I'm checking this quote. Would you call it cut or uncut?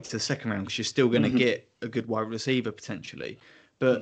uncut